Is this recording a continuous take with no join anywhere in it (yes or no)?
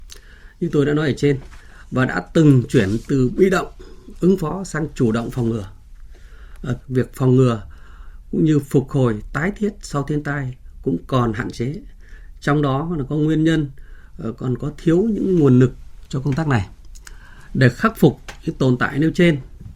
no